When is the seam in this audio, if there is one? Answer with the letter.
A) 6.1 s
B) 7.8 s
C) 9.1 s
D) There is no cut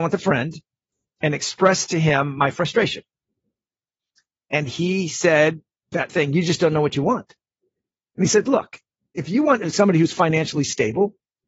A